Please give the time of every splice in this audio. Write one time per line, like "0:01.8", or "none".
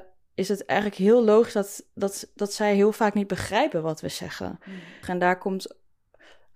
0:05.0